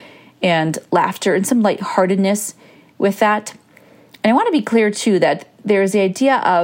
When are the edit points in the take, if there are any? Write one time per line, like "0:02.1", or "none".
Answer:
none